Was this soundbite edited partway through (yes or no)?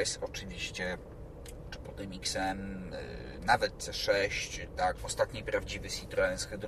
yes